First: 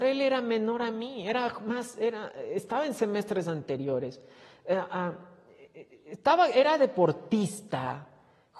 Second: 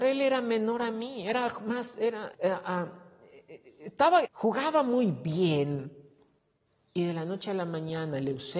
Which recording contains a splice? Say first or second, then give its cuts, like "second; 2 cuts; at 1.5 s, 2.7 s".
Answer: second; 2 cuts; at 2.3 s, 4.2 s